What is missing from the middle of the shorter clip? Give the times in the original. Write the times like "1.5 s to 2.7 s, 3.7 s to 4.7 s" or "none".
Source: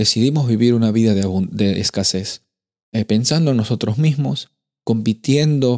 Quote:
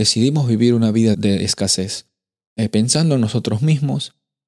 1.1 s to 1.5 s